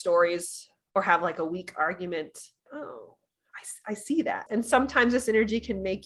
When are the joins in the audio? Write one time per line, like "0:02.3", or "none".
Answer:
0:02.7
0:04.5